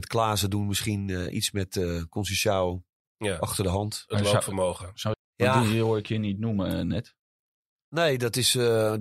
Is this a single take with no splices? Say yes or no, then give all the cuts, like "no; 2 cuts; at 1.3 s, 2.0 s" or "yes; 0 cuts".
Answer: no; 1 cut; at 5.1 s